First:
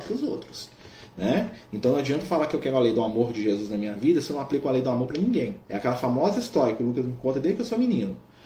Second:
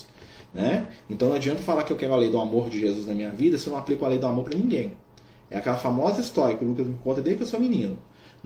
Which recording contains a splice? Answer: first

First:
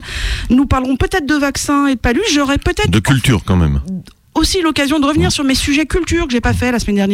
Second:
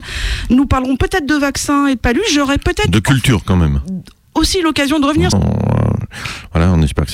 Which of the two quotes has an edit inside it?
second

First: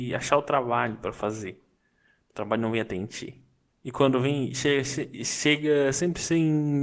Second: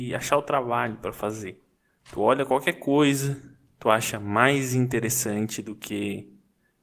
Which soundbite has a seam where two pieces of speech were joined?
second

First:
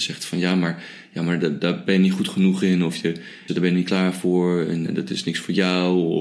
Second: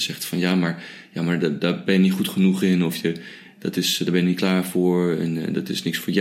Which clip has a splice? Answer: first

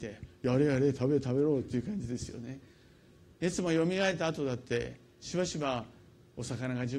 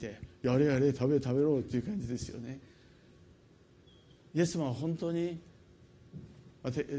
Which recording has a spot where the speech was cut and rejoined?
first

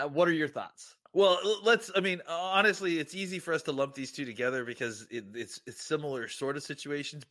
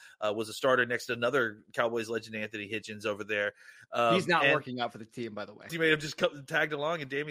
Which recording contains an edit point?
second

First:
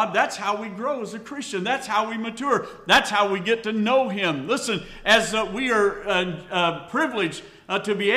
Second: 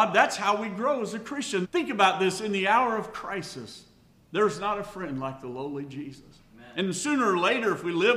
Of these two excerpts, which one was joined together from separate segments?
second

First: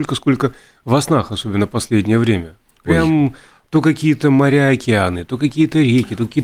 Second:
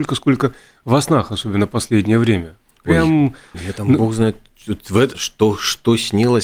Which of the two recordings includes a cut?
second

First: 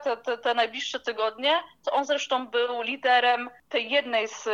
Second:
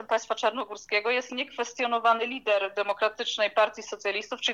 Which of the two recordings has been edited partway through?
first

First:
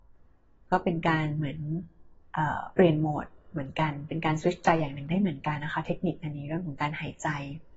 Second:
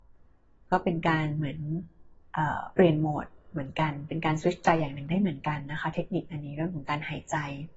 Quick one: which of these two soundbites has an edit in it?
first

